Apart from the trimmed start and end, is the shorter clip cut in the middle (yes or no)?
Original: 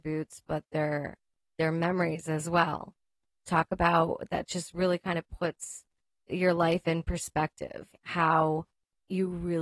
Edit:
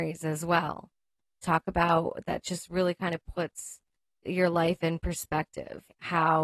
no